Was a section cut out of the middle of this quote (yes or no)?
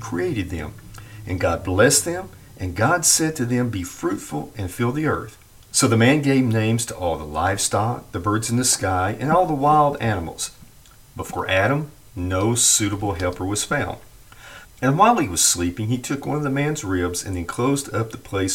yes